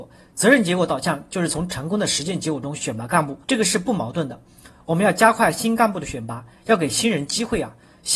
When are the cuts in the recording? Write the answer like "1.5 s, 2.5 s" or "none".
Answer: 3.4 s